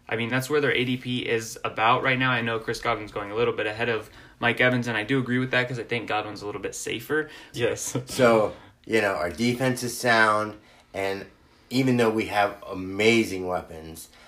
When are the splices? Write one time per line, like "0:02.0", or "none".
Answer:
0:07.5